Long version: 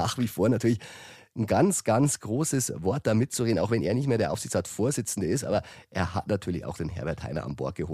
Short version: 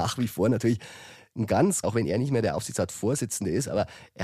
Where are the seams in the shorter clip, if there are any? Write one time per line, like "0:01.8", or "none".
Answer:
0:01.8